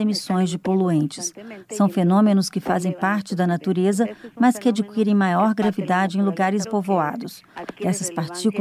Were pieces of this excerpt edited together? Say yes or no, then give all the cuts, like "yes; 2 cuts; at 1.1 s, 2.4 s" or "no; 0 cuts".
yes; 1 cut; at 6.6 s